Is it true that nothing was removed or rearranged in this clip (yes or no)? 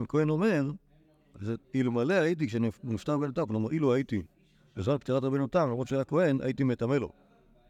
no